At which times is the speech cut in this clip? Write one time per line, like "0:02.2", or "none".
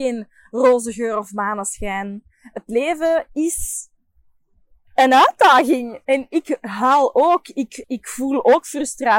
0:06.0
0:07.8